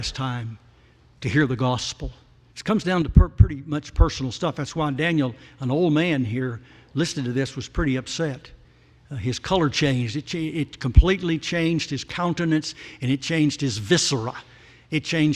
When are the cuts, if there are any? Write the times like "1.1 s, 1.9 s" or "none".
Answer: 2.5 s